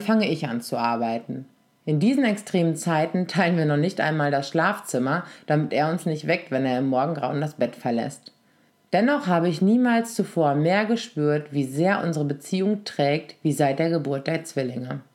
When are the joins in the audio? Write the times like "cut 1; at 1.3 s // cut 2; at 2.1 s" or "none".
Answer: none

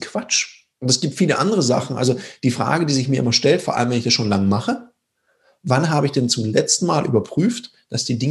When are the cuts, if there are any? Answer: none

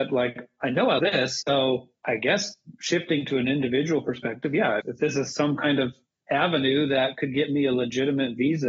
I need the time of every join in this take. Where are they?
cut 1; at 1.0 s // cut 2; at 4.8 s

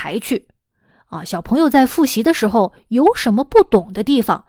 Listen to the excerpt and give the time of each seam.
none

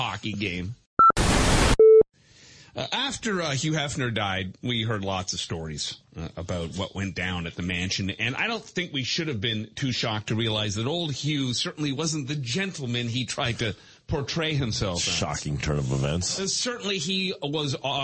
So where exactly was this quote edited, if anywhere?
none

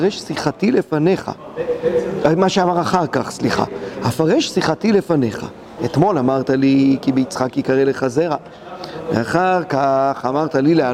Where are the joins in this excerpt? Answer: cut 1; at 5.8 s

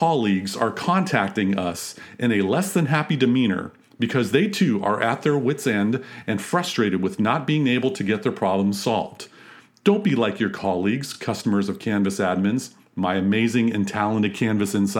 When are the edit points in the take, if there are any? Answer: none

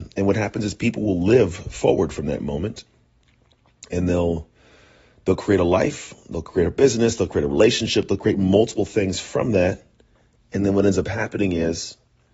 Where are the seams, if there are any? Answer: none

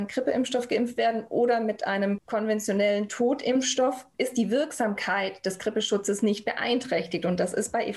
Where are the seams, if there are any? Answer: none

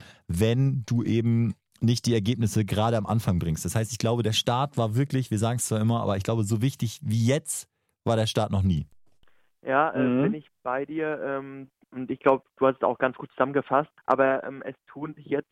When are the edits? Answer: cut 1; at 14.0 s

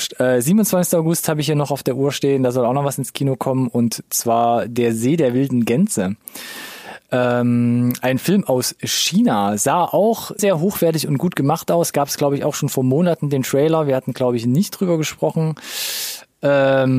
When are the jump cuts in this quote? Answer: cut 1; at 10.4 s

